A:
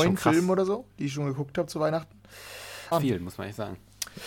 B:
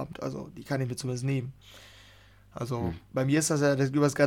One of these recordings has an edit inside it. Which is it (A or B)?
A